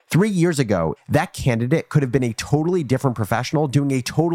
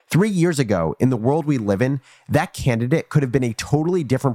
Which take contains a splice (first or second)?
first